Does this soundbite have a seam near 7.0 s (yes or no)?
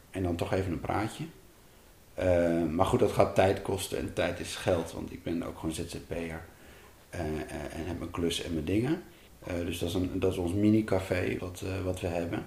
no